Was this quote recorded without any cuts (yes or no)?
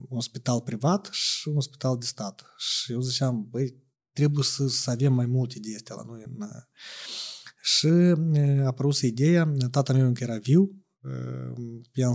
yes